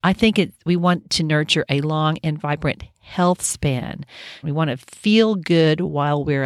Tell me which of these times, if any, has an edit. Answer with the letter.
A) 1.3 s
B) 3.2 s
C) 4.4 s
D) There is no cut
C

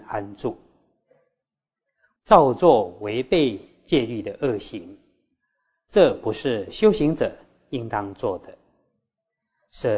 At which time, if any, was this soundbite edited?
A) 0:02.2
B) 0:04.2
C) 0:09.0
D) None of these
A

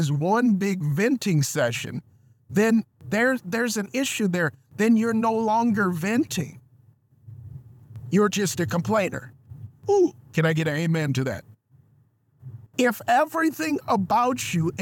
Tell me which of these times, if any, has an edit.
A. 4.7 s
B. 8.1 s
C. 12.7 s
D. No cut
C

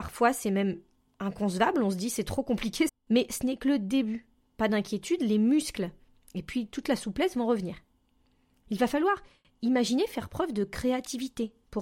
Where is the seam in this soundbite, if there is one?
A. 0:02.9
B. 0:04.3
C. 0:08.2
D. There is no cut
A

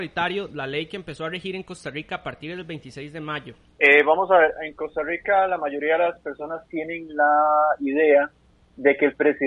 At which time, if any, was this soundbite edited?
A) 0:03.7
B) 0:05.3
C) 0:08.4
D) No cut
A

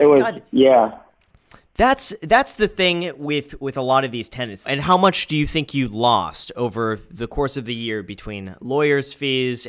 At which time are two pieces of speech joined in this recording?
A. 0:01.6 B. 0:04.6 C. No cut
B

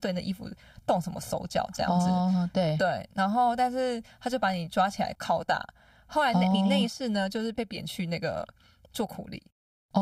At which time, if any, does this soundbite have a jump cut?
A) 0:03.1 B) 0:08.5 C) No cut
C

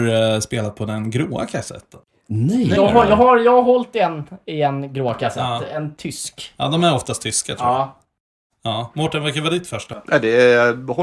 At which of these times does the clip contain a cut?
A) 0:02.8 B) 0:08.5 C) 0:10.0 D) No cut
A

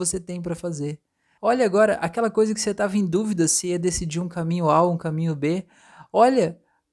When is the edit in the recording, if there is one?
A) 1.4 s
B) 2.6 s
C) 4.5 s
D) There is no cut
A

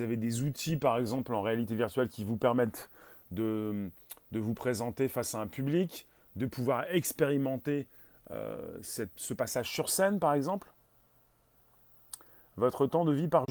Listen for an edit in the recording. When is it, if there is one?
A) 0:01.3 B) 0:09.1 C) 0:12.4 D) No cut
D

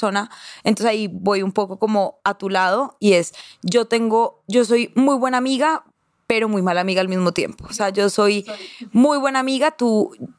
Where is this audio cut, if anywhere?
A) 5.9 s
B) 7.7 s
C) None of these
C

